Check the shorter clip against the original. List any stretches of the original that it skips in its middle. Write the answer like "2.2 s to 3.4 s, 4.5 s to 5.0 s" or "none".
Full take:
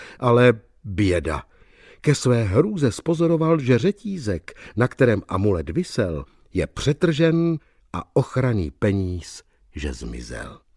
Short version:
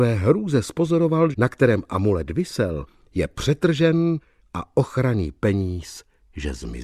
3.6 s to 4.7 s

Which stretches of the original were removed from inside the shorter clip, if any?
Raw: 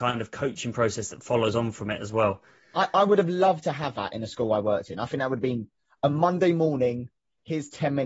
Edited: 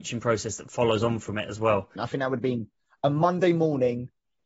2.5 s to 5.0 s

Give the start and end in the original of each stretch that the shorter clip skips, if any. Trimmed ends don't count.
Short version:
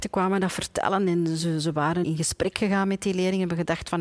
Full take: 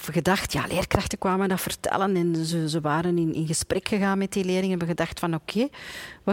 3.1 s to 3.3 s

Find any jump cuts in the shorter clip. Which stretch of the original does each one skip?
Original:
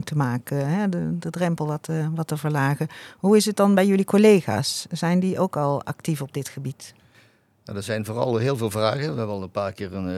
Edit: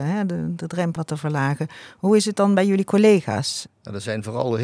1.6 s to 2.2 s, 4.9 s to 7.5 s

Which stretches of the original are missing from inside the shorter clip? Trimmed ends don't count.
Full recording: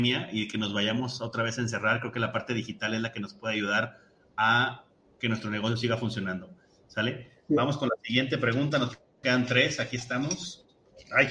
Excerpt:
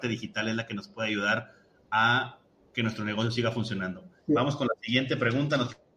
6.7 s to 7.4 s

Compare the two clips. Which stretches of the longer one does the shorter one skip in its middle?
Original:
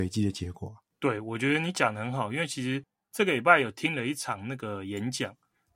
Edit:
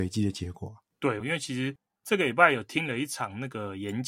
1.2 s to 2.3 s

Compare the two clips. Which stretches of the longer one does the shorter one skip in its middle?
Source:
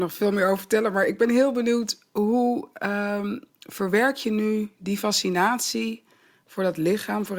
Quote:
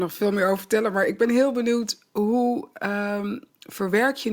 none

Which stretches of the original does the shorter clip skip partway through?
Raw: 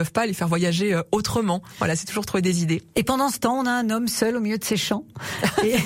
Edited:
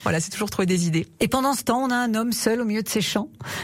none

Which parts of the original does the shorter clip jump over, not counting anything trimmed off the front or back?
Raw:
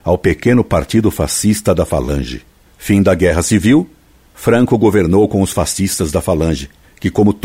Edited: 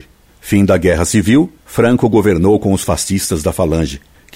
4.0 s to 4.3 s

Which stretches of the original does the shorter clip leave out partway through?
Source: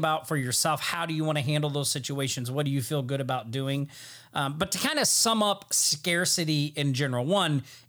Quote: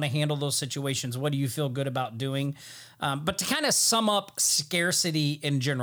none

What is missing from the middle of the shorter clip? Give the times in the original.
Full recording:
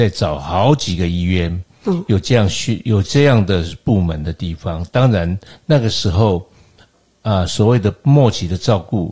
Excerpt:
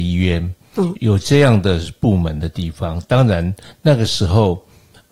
2.0 s to 2.8 s

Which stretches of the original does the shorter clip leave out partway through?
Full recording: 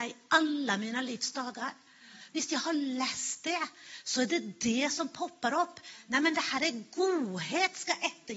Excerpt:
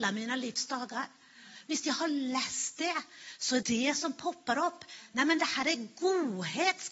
4.3 s to 4.6 s

